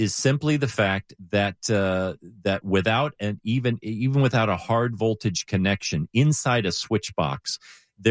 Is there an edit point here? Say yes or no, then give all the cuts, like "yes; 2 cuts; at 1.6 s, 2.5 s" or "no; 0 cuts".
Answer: no; 0 cuts